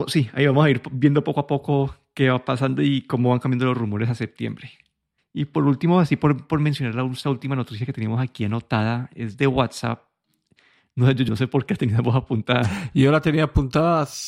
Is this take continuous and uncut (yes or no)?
no